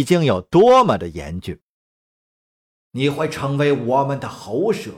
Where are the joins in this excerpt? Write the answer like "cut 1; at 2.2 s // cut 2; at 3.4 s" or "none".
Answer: cut 1; at 2.8 s